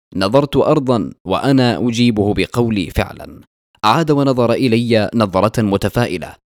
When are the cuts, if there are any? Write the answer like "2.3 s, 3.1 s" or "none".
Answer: 2.9 s

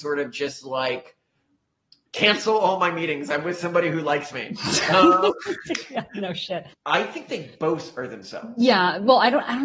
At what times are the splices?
6.7 s

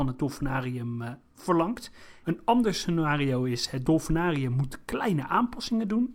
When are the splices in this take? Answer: 2.2 s

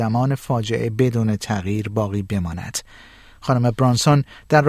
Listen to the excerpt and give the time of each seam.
none

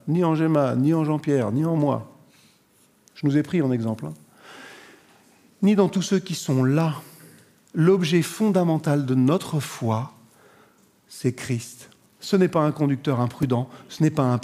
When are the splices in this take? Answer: none

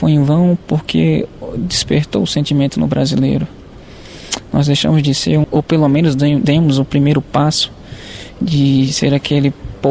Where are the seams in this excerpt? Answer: 5.4 s

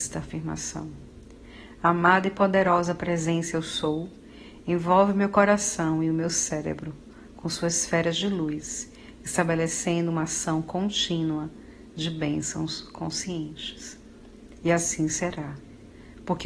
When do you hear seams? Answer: 14.6 s

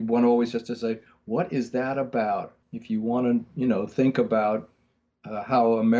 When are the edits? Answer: 2.6 s

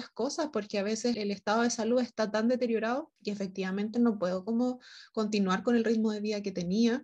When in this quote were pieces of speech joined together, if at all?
1.1 s, 3.2 s

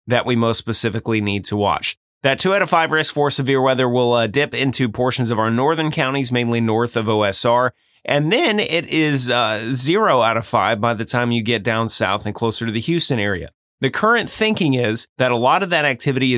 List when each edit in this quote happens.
none

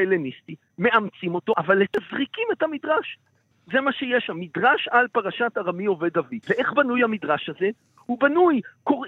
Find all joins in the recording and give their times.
3.5 s, 6.4 s

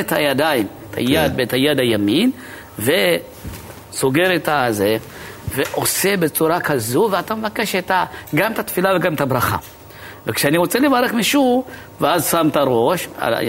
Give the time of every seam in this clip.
none

